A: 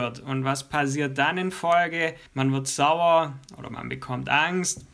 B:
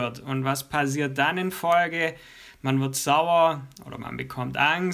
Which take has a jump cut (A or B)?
A